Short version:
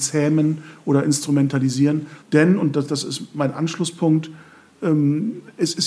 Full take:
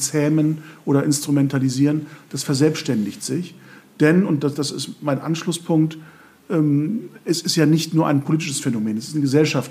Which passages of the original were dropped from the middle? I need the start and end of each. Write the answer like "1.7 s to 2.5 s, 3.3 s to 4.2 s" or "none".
2.2 s to 3.9 s